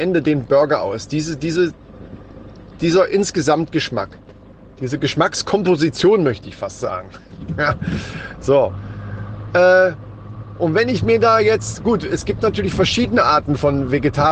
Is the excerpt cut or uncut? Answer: uncut